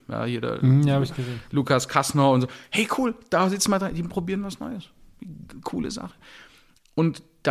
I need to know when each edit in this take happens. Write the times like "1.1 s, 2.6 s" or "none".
none